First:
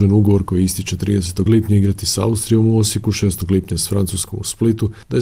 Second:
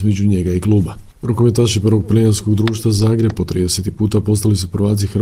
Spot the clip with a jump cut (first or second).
first